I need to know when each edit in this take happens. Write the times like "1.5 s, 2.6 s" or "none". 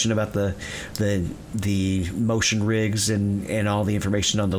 none